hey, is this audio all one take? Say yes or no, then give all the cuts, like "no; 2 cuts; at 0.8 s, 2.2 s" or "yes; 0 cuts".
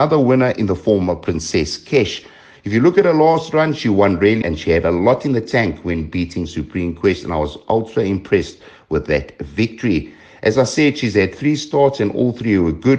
no; 1 cut; at 4.4 s